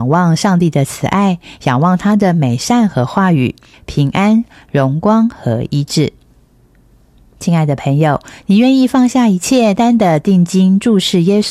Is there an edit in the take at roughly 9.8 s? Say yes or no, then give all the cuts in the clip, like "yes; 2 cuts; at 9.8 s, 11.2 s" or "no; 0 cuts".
yes; 2 cuts; at 3.7 s, 9.8 s